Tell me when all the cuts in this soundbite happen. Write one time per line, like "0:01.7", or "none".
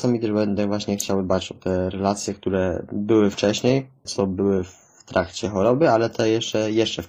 0:04.1